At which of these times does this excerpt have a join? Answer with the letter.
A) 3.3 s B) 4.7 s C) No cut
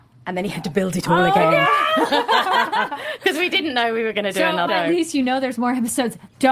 B